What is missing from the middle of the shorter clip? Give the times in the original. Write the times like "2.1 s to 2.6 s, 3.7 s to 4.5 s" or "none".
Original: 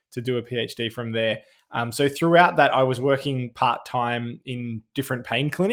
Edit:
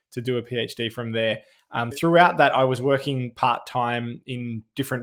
1.9 s to 2.1 s